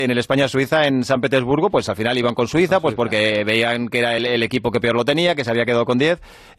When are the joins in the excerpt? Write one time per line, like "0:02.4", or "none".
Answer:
0:04.2